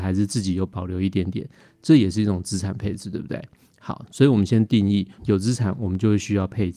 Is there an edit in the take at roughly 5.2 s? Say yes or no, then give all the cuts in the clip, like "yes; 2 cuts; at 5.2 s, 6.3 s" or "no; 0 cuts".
yes; 1 cut; at 5.2 s